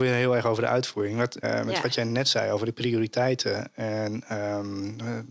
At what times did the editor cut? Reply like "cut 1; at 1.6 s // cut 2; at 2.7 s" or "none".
cut 1; at 1.4 s